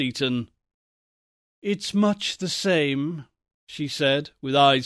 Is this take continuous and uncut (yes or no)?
yes